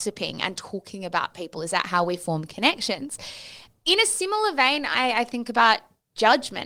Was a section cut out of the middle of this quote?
no; 0 cuts

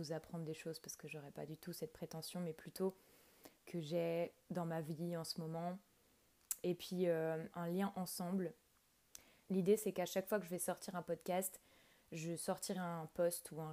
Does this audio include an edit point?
yes; 3 cuts; at 3.6 s, 7.5 s, 9.5 s

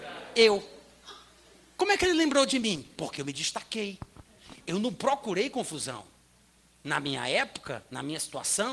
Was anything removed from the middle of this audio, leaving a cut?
no; 0 cuts

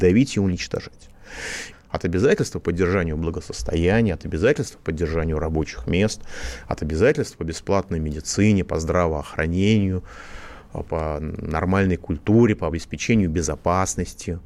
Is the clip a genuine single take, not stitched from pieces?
no; 2 cuts; at 1.7 s, 10.9 s

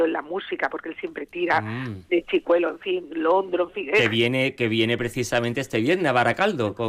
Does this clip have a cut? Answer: no; 0 cuts

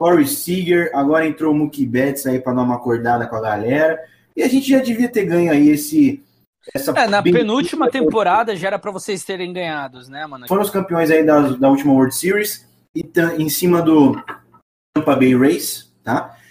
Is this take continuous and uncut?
no; 1 cut; at 10.5 s

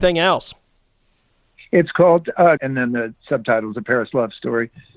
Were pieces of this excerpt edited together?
yes; 1 cut; at 2.6 s

